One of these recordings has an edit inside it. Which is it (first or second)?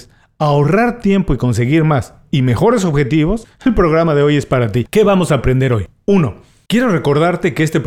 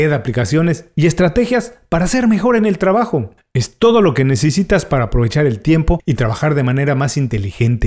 first